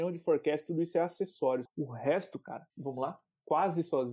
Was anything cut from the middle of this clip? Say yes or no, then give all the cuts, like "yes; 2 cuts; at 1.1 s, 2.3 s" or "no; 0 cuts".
yes; 2 cuts; at 1.7 s, 2.7 s